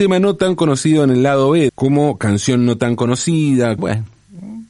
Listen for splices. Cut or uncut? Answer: cut